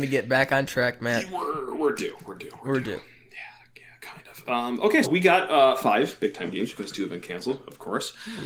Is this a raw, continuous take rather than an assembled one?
no; 1 cut; at 5.0 s

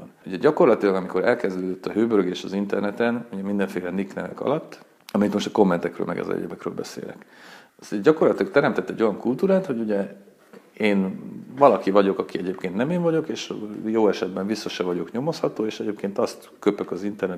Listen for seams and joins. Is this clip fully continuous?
yes; 0 cuts

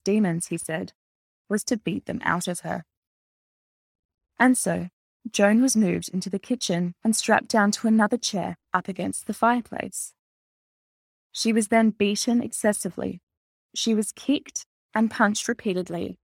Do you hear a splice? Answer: no; 0 cuts

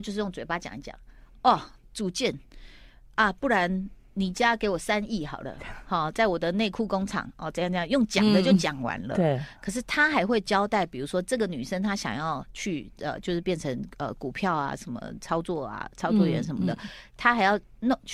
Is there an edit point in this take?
no; 0 cuts

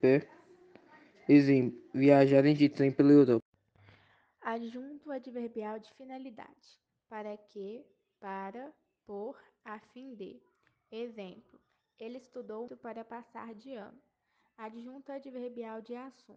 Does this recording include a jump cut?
yes; 1 cut; at 12.7 s

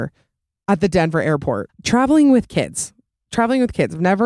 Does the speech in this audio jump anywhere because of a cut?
yes; 1 cut; at 1.7 s

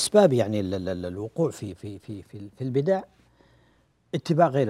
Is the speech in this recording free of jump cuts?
yes; 0 cuts

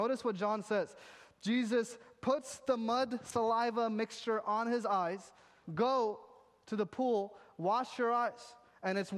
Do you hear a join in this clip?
yes; 1 cut; at 5.6 s

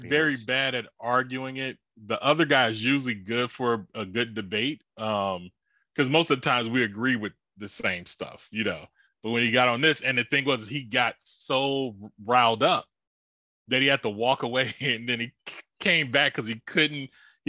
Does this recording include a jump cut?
no; 0 cuts

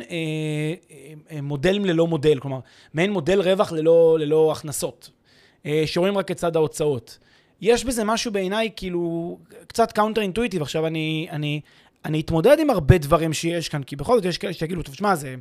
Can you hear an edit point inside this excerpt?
no; 0 cuts

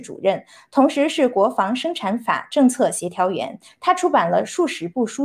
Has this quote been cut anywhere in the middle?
yes; 1 cut; at 3.7 s

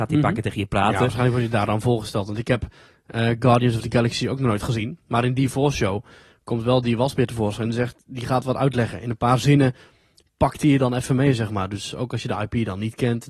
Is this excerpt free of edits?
yes; 0 cuts

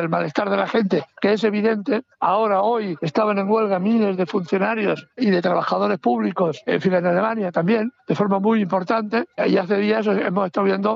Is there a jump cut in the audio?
no; 0 cuts

